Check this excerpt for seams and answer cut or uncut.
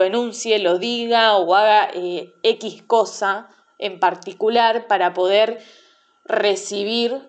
uncut